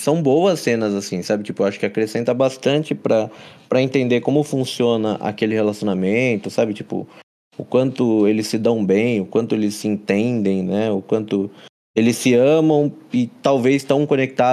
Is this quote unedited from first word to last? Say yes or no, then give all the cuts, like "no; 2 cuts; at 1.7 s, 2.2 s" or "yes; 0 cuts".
yes; 0 cuts